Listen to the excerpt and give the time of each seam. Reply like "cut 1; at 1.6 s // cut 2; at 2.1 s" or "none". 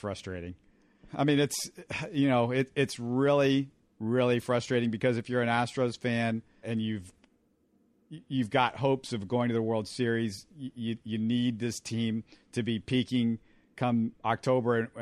cut 1; at 1.1 s // cut 2; at 6.6 s